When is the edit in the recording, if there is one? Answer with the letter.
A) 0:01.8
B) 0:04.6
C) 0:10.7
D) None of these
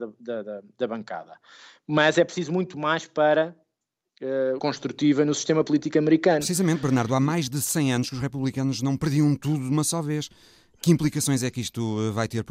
B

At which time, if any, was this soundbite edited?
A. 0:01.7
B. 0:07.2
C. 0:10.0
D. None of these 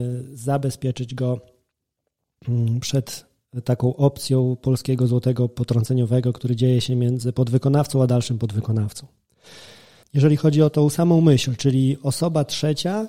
C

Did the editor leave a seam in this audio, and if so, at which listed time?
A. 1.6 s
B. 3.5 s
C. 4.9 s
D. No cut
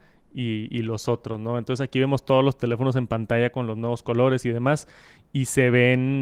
D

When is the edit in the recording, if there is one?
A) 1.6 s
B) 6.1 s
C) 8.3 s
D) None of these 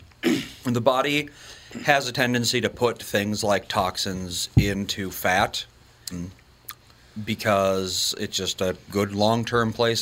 B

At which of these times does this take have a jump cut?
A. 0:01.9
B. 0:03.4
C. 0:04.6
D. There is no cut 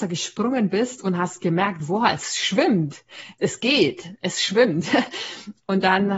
B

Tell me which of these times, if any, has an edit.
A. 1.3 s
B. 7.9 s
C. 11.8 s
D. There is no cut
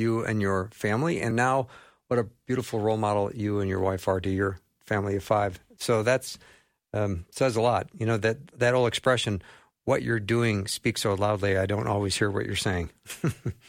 A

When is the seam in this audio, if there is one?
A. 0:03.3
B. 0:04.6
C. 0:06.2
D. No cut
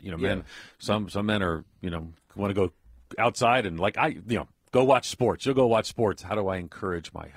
C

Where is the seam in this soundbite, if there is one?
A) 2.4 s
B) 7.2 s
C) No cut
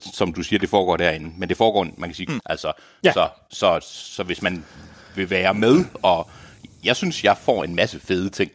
A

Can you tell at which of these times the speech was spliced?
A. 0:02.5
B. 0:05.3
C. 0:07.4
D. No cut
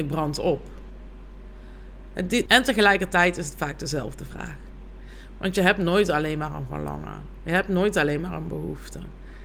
A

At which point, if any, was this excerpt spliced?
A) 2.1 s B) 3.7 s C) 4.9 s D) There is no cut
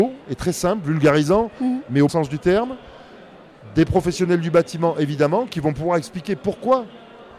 A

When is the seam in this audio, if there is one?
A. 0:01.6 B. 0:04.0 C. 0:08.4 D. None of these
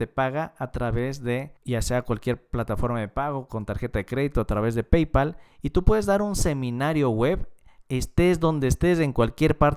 A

